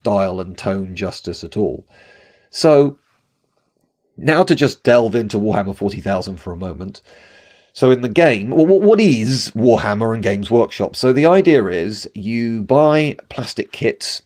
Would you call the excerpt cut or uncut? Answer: uncut